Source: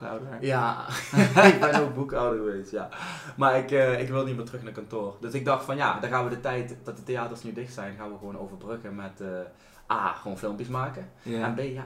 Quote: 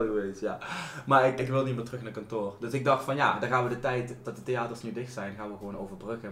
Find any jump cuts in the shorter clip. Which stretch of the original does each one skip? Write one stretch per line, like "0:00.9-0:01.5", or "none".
0:03.7-0:04.0